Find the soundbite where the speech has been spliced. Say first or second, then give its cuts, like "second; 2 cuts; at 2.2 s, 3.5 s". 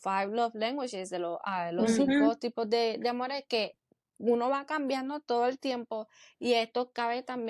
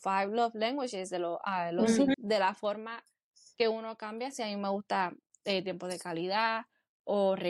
second; 1 cut; at 2.1 s